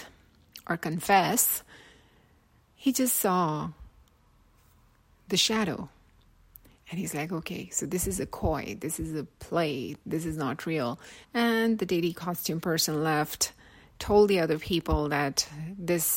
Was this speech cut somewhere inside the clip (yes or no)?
yes